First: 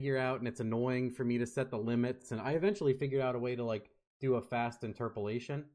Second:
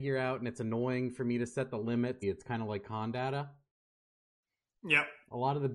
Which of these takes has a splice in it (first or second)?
second